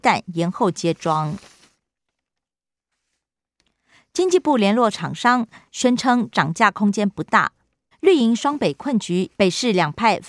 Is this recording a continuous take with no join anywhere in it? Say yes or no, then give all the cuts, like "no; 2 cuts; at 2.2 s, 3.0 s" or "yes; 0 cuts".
no; 2 cuts; at 7.9 s, 9.3 s